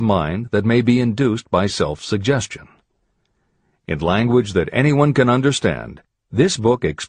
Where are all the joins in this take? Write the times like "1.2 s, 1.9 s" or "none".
none